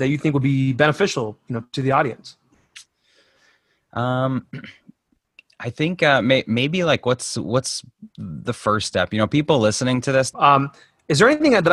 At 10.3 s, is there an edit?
yes; 1 cut; at 10.3 s

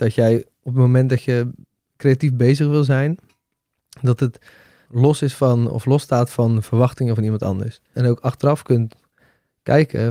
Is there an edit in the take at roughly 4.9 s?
yes; 2 cuts; at 4.9 s, 7.9 s

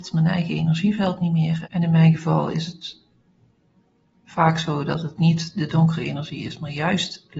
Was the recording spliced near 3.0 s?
no; 1 cut; at 1.7 s

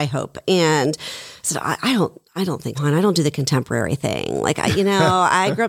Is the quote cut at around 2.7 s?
yes; 1 cut; at 2.7 s

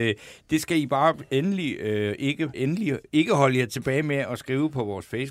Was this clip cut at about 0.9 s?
no; 1 cut; at 2.5 s

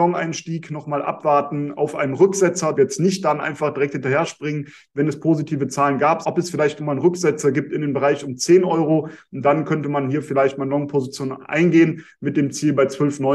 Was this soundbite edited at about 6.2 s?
yes; 2 cuts; at 2.7 s, 6.2 s

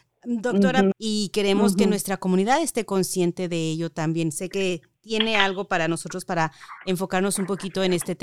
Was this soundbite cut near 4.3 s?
no; 1 cut; at 0.9 s

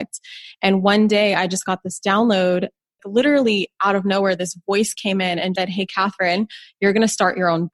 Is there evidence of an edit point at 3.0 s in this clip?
yes; 2 cuts; at 3.0 s, 5.6 s

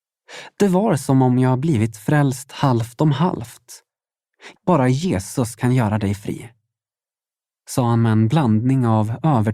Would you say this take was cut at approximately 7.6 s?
no; 1 cut; at 4.6 s

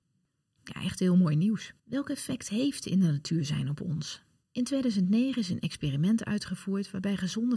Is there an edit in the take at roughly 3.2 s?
no; 2 cuts; at 1.8 s, 4.4 s

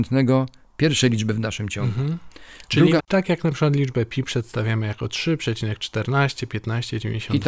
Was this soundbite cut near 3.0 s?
yes; 1 cut; at 3.0 s

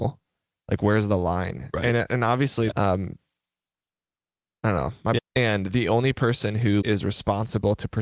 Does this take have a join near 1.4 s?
no; 3 cuts; at 2.7 s, 5.2 s, 6.8 s

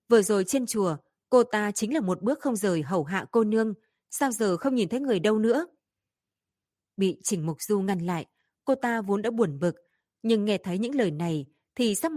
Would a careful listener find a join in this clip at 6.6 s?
no; 0 cuts

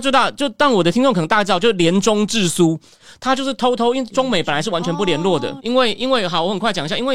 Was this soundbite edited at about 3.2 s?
no; 1 cut; at 5.6 s

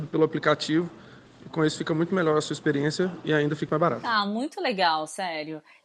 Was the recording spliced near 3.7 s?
yes; 1 cut; at 3.7 s

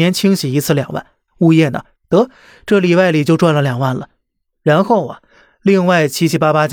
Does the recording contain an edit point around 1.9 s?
yes; 1 cut; at 1.9 s

